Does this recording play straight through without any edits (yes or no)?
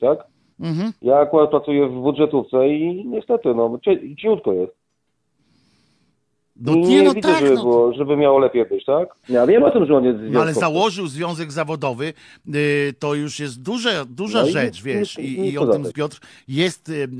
no